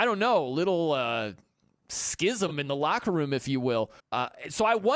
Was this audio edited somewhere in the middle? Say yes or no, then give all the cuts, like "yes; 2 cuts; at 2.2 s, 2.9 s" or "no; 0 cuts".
yes; 1 cut; at 4.0 s